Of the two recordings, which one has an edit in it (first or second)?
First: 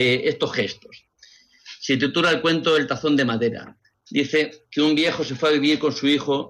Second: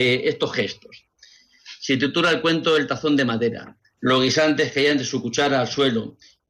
second